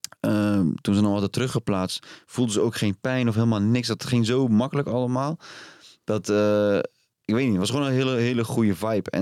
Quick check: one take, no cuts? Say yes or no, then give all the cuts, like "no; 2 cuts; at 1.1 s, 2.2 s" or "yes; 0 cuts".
yes; 0 cuts